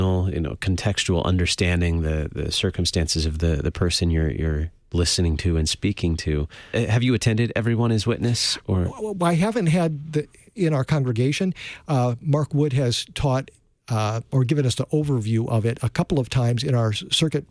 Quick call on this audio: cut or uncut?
cut